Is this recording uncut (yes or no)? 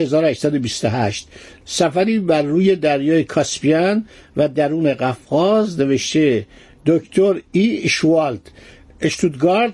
yes